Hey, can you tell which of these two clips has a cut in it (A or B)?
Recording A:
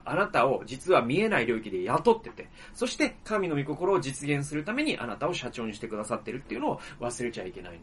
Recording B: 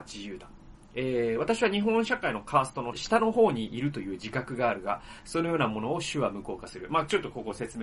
B